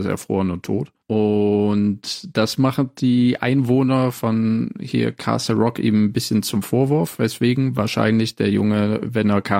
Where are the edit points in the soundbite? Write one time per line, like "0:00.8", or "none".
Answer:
0:01.0
0:04.1